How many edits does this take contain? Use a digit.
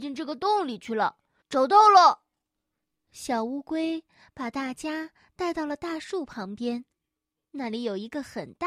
1